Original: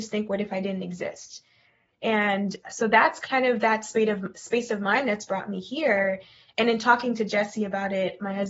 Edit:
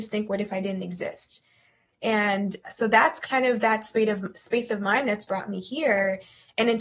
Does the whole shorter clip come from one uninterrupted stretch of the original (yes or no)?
yes